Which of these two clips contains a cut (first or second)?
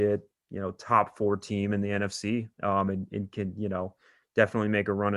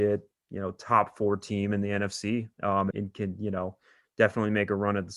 second